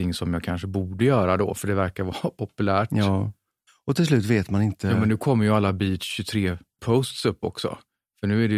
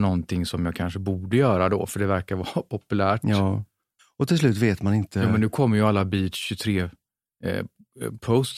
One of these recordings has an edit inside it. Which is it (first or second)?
first